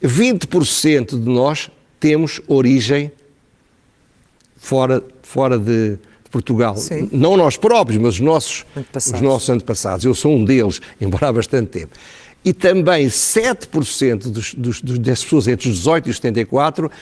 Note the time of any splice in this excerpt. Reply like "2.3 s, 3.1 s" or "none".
none